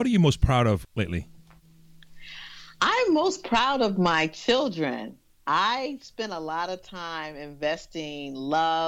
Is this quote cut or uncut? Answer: uncut